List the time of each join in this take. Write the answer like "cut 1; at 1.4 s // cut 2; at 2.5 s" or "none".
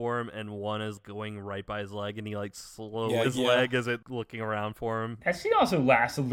cut 1; at 3.2 s // cut 2; at 5.2 s